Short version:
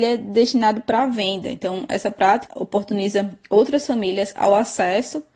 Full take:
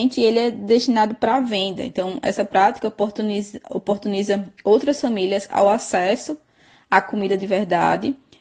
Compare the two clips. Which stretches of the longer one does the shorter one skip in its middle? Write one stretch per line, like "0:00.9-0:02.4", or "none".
0:02.8-0:03.6